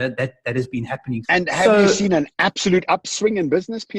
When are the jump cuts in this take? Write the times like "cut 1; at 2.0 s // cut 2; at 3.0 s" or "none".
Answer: cut 1; at 1.2 s